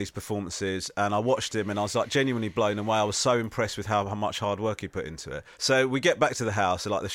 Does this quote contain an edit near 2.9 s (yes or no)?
no